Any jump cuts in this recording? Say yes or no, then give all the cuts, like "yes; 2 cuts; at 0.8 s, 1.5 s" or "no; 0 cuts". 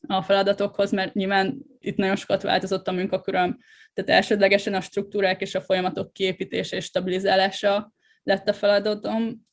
yes; 1 cut; at 1.8 s